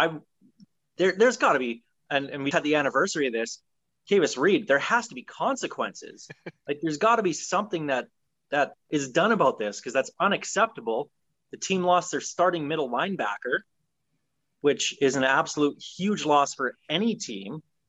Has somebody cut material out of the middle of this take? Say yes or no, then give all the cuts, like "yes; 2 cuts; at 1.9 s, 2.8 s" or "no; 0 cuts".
yes; 1 cut; at 2.5 s